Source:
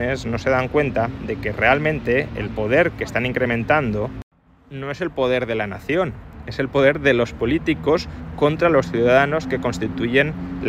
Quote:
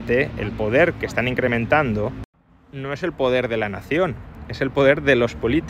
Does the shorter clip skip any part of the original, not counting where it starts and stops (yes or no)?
no